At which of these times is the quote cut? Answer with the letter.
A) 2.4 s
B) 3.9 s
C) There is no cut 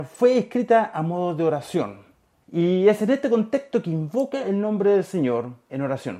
A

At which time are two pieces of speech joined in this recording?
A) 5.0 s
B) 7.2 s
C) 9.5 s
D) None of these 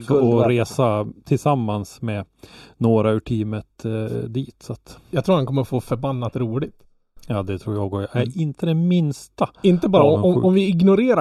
D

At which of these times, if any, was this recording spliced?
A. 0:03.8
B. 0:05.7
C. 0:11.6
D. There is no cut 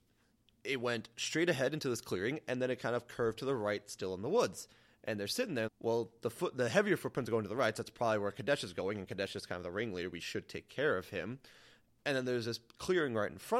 B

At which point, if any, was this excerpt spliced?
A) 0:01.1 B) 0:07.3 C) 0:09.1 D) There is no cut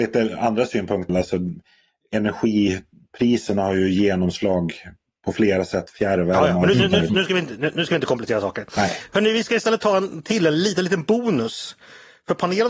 A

